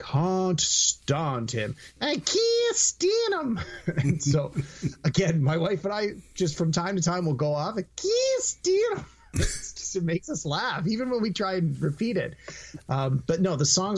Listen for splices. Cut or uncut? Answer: uncut